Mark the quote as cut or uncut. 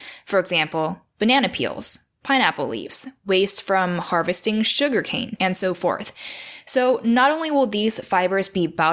cut